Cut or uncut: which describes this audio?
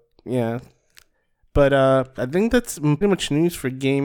cut